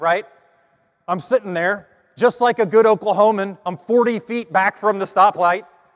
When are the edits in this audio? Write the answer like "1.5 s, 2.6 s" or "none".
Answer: none